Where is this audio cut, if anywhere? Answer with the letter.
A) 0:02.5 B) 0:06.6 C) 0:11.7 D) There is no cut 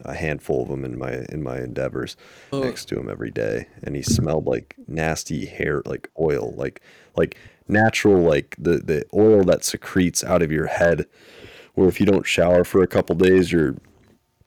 A